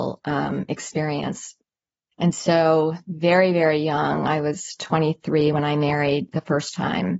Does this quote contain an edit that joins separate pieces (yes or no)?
yes